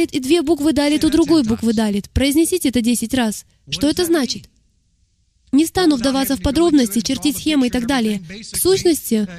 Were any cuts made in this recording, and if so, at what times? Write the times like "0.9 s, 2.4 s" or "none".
none